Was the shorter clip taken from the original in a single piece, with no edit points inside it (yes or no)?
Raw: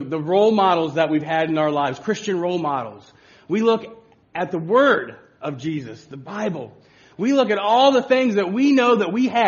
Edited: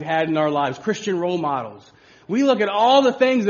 no